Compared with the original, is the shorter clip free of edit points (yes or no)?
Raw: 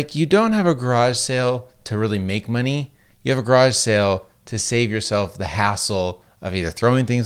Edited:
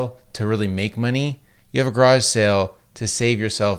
yes